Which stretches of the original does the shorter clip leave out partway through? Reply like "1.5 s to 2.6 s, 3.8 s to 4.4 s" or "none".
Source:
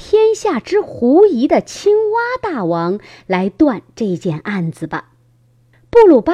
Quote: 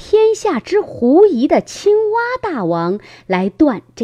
none